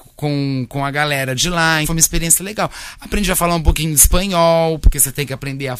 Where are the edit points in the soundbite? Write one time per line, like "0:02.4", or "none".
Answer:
0:01.8